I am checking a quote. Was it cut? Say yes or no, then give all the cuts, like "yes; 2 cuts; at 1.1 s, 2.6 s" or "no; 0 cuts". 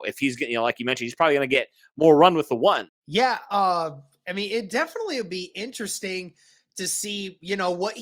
yes; 1 cut; at 2.9 s